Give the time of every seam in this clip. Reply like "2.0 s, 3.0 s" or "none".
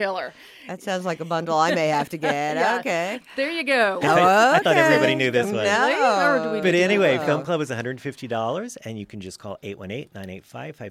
4.0 s

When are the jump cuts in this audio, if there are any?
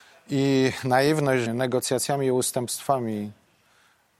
1.5 s

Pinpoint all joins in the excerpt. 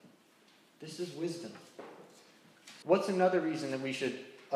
2.8 s

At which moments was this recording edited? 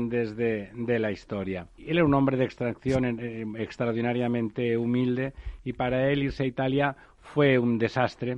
1.8 s

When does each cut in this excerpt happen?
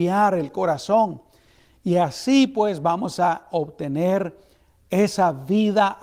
none

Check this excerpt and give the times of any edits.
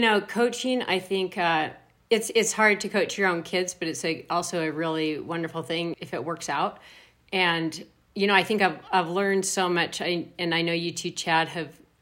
5.9 s

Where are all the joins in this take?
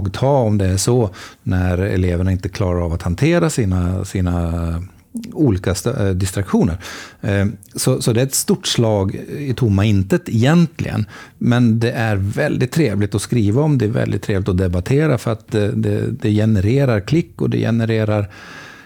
none

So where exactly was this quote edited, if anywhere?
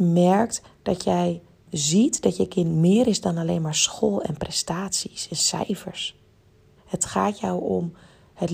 1.7 s, 6.8 s

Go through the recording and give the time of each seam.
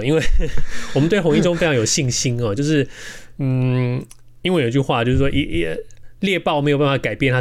none

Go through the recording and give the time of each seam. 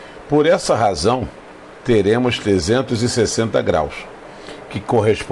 1.8 s

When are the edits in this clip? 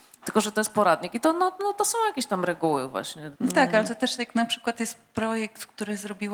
3.4 s

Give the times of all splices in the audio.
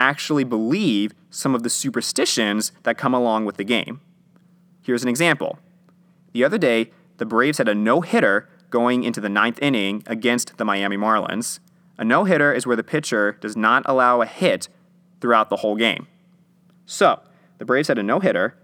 none

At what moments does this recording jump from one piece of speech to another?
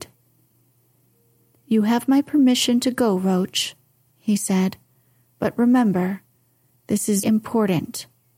7.2 s

